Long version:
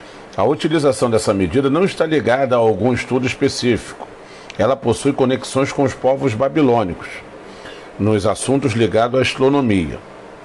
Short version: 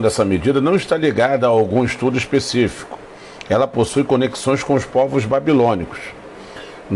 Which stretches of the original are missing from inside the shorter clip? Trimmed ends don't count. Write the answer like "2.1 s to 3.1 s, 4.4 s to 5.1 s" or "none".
none